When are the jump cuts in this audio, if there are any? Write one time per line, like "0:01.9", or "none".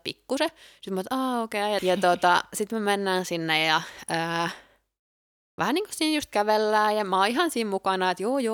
0:01.8

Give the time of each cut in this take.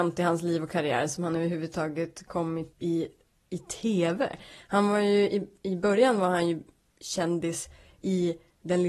0:02.7

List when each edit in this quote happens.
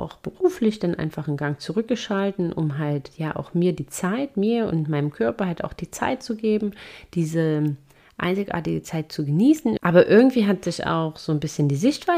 0:09.8

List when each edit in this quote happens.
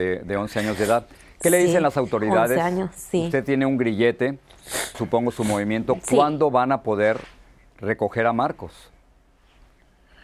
0:04.9

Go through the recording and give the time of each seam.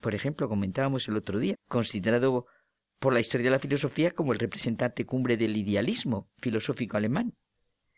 0:01.5

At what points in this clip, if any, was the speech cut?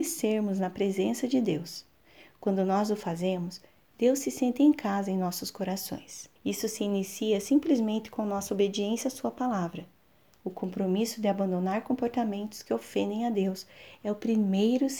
0:06.4

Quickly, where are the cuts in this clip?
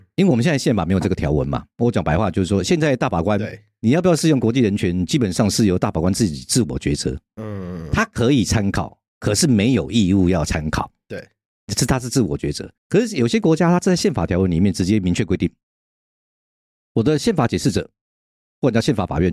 0:12.8

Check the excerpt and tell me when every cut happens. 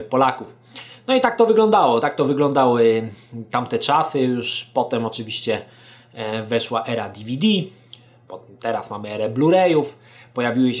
none

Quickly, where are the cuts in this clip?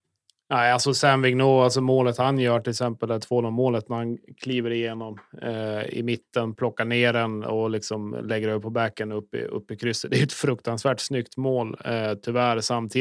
none

